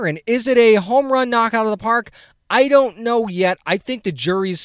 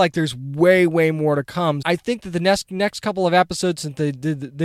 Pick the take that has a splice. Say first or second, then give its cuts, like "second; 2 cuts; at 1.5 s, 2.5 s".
second; 1 cut; at 1.8 s